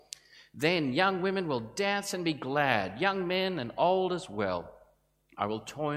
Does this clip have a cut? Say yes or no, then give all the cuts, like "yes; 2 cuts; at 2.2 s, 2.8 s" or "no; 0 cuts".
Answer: no; 0 cuts